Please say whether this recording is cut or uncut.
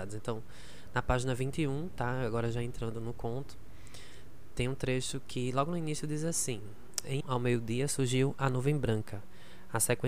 cut